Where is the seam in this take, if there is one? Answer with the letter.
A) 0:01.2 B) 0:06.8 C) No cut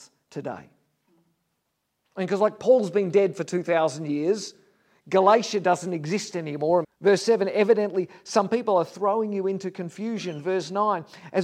B